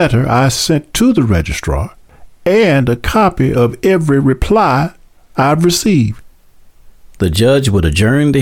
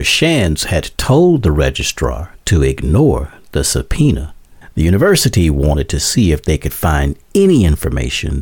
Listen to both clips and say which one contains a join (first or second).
second